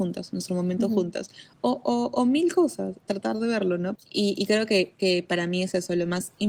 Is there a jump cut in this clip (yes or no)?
yes